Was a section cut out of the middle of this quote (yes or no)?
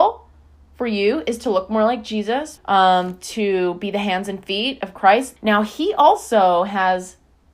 yes